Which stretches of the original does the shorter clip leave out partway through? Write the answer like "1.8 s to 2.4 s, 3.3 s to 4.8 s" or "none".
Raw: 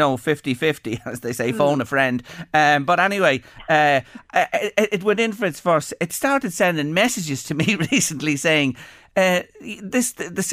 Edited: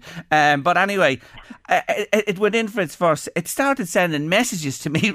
3.6 s to 4.1 s